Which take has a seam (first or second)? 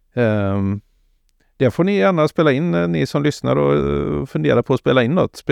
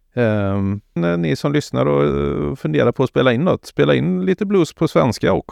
second